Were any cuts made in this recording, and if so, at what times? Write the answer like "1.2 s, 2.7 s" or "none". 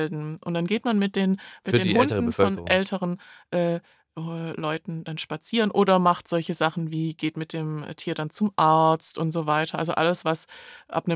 none